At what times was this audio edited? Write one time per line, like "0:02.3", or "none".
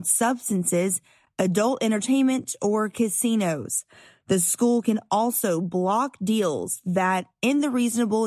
none